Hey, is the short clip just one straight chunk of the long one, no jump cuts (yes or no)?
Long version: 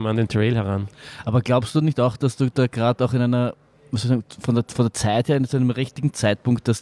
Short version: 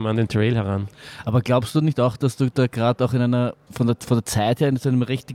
no